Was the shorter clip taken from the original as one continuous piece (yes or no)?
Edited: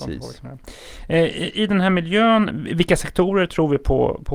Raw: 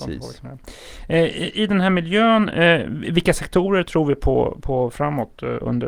no